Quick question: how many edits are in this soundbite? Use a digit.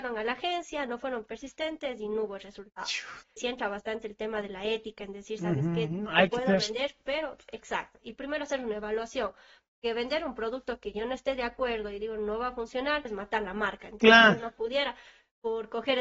2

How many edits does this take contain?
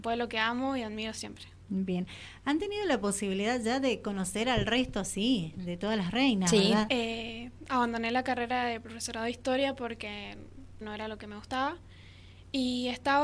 2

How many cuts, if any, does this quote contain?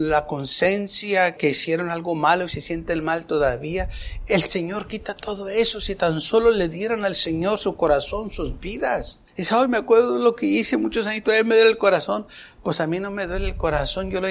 2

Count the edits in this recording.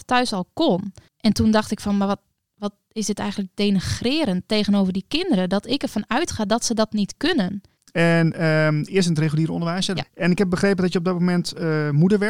3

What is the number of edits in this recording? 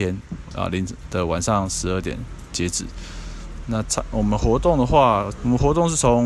2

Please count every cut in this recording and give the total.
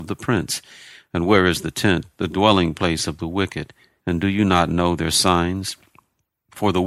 1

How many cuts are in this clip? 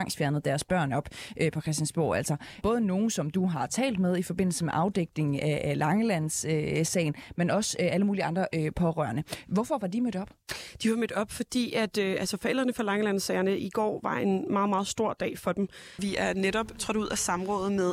2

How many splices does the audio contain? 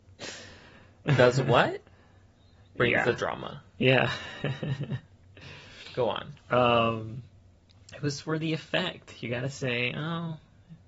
0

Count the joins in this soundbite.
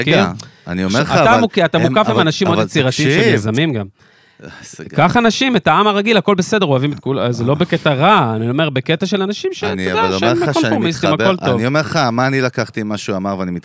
0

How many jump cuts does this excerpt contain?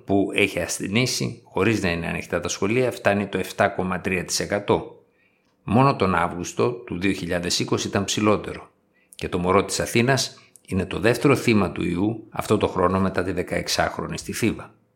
0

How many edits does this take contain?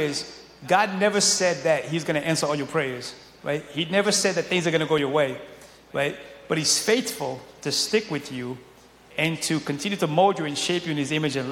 0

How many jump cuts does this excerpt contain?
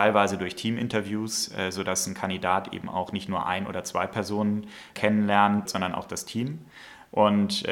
1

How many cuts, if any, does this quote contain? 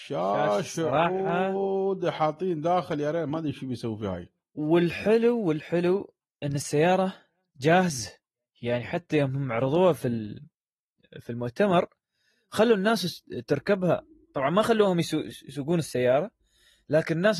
0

